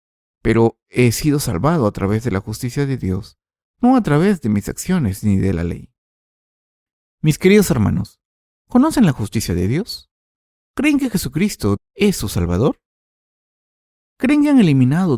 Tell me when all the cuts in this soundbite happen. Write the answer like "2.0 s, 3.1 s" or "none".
11.8 s